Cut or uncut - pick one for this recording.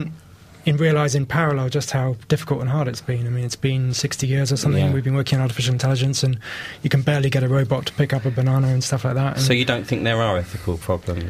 uncut